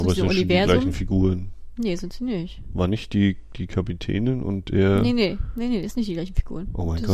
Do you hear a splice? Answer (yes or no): no